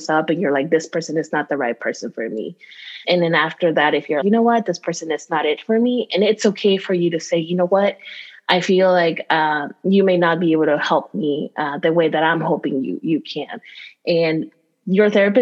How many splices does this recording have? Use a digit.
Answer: 2